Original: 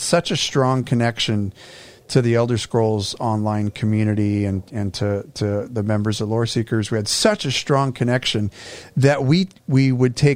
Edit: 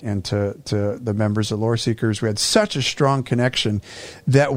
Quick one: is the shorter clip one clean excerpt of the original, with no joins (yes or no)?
yes